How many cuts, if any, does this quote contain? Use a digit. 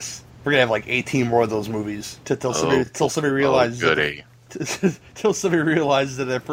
0